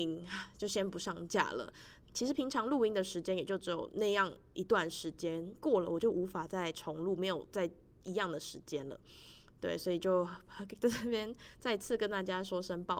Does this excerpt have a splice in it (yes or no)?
yes